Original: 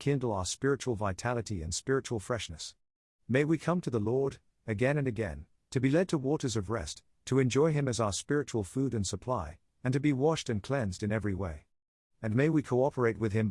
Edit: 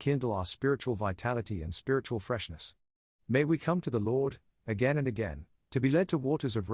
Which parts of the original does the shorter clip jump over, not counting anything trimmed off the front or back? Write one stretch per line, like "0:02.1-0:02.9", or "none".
none